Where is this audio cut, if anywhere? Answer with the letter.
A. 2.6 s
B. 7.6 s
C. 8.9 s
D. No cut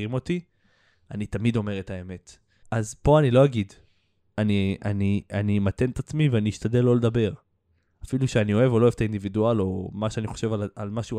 A